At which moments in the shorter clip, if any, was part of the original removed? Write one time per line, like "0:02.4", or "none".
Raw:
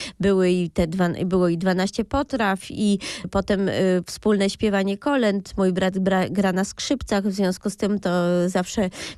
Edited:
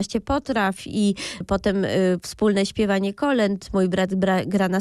none